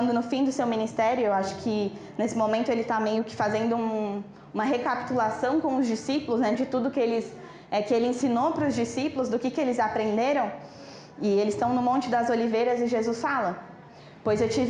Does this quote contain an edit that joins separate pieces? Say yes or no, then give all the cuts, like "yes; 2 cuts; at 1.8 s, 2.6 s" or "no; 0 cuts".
yes; 1 cut; at 6.5 s